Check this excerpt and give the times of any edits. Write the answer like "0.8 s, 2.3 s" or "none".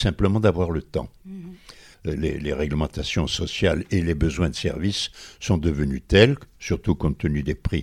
1.9 s